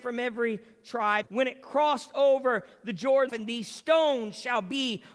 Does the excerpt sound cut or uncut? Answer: cut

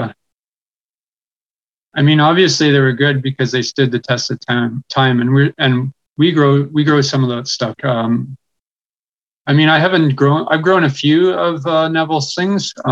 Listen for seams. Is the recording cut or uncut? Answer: cut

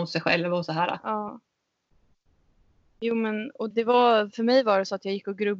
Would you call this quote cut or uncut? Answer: cut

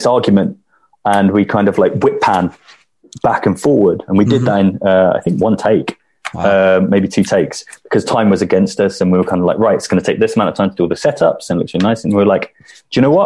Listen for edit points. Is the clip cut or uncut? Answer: uncut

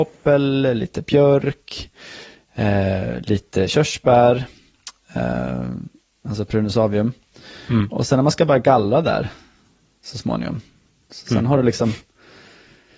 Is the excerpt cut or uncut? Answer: uncut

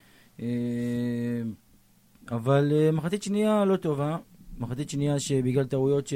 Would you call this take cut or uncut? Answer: uncut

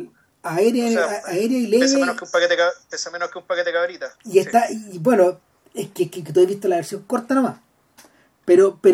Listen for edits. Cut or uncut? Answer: cut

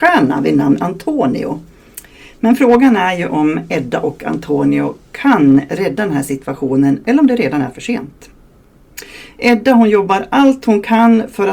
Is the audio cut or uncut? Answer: uncut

